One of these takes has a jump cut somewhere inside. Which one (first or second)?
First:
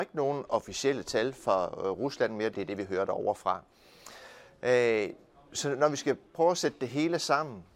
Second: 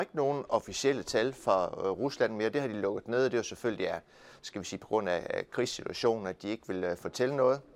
first